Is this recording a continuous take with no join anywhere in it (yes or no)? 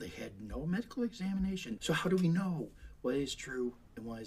no